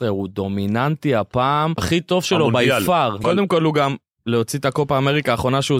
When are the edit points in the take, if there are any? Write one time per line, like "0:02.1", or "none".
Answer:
0:01.8
0:03.2